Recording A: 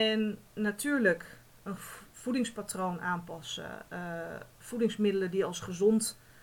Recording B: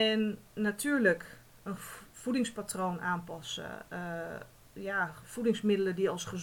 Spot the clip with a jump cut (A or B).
A